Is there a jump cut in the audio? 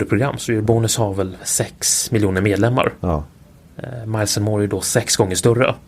yes; 1 cut; at 1.4 s

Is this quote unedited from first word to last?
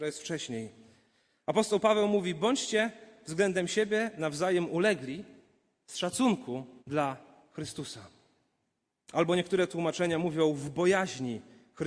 no; 1 cut; at 6.8 s

